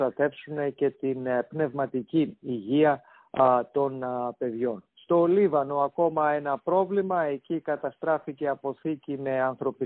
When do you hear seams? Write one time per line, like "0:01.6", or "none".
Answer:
0:04.9